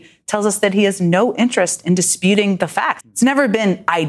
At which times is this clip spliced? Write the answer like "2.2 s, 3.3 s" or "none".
3.0 s